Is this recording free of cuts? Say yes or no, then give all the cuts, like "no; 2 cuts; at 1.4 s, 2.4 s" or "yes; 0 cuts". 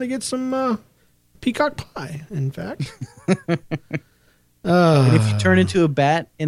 yes; 0 cuts